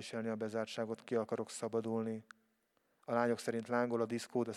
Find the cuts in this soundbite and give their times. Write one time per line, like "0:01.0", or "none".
0:03.0